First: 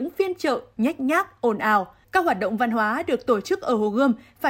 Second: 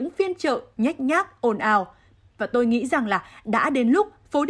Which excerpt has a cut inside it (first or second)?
first